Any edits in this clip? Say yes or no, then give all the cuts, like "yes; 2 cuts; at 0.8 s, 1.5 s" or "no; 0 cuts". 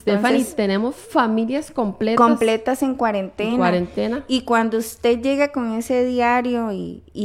no; 0 cuts